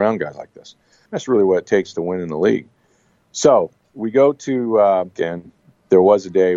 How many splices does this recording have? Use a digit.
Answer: 2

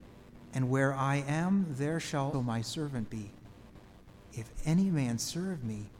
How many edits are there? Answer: 1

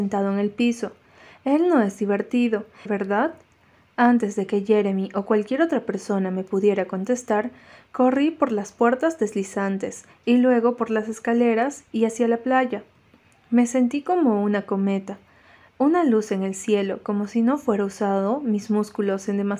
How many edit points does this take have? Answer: 1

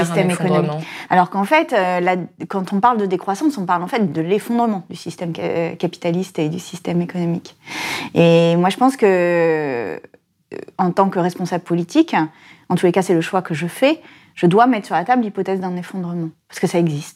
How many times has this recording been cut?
1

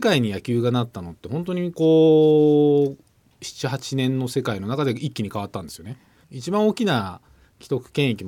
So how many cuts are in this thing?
2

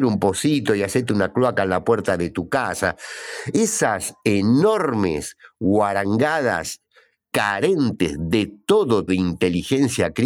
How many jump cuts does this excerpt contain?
2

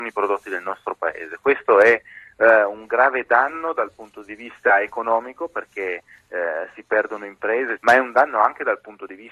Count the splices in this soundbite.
1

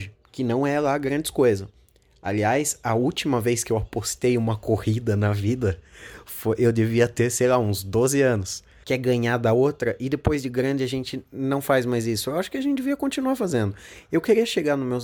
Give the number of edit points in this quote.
1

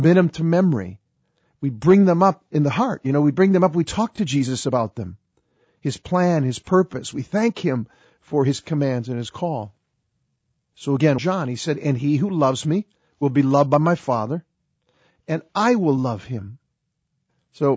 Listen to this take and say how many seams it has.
1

